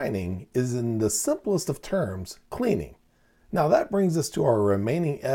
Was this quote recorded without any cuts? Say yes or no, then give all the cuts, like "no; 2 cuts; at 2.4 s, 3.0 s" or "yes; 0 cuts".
yes; 0 cuts